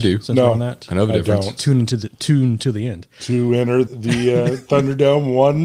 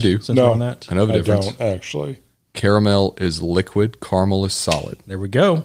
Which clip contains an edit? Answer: first; 2 cuts; at 1.6 s, 3.9 s

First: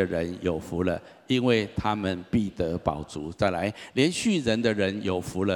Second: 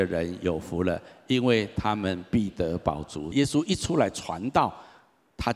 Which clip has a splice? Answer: second; 1 cut; at 3.3 s

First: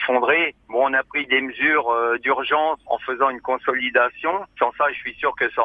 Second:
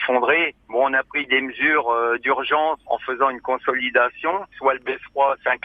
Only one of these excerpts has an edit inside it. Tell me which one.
second; 1 cut; at 4.5 s

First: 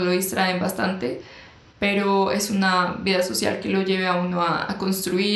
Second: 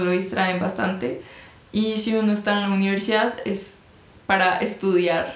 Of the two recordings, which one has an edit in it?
first; 1 cut; at 1.6 s

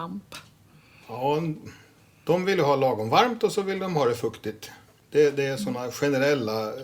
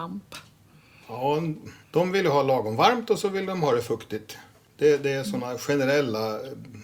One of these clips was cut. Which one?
second; 1 cut; at 1.8 s

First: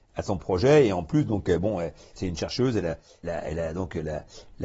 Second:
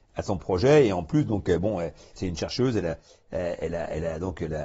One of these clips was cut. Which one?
first; 1 cut; at 3.2 s

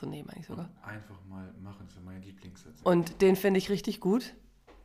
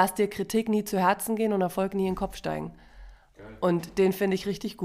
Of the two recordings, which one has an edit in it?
first; 1 cut; at 2.8 s

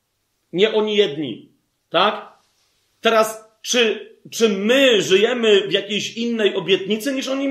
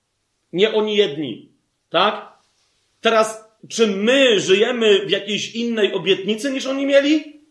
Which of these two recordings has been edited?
second; 1 cut; at 3.6 s

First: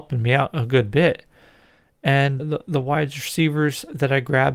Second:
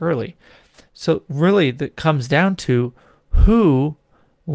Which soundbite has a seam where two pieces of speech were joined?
first; 1 cut; at 2.4 s

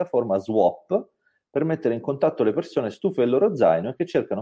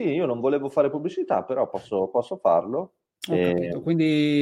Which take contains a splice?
second; 1 cut; at 3.2 s

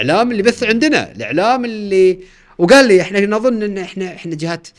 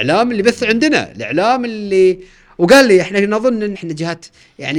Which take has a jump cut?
second; 1 cut; at 3.7 s

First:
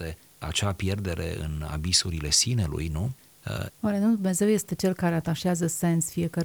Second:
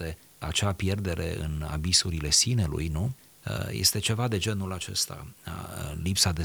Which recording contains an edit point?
first; 1 cut; at 3.7 s

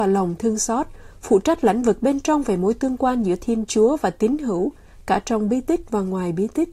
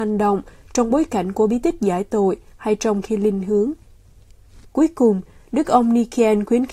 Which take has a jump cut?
second; 1 cut; at 4.6 s

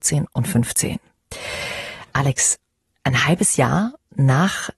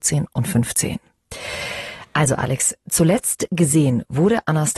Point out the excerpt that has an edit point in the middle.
first; 1 cut; at 2.1 s

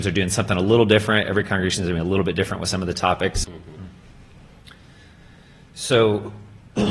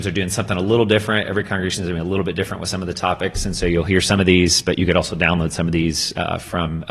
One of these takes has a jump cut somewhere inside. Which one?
first; 1 cut; at 3.4 s

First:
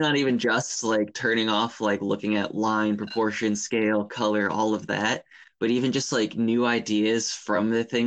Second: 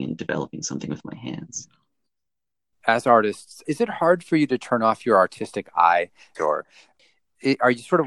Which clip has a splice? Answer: second; 2 cuts; at 3.6 s, 6.3 s

